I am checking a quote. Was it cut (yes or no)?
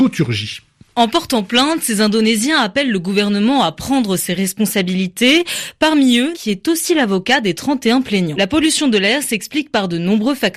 yes